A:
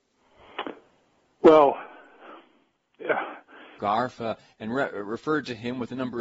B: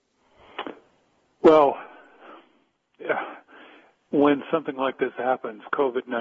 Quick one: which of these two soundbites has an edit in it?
A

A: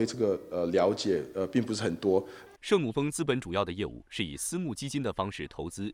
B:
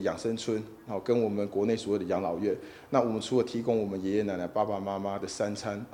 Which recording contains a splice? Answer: A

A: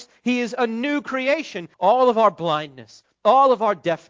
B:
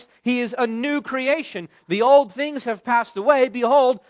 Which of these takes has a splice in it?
A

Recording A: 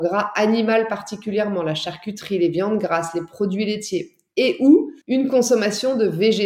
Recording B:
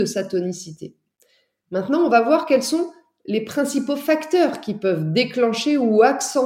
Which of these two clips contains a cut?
A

